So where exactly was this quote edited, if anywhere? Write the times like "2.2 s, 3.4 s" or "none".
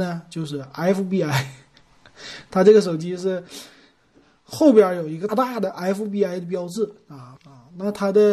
5.3 s, 7.4 s

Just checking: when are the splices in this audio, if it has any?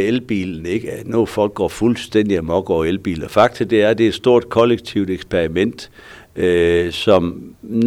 none

